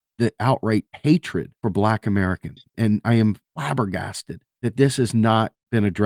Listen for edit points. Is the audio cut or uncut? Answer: cut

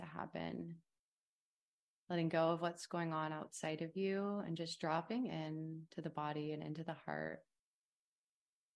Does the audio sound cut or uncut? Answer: uncut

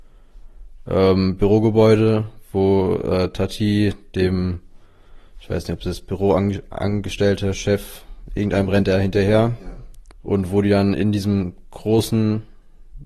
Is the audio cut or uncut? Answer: cut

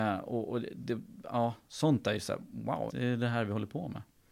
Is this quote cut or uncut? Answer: cut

